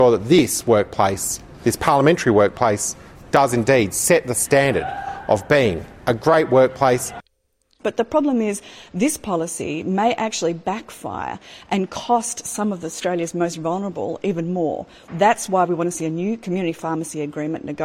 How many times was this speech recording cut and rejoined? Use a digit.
2